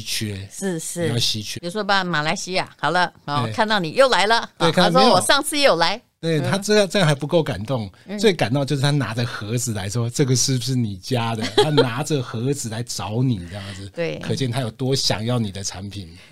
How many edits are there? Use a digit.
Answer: 1